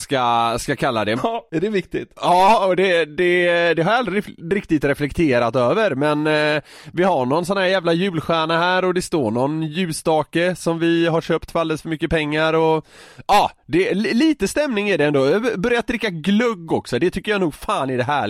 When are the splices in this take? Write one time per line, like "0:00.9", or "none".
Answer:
0:01.2